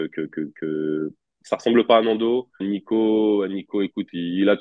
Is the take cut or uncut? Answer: cut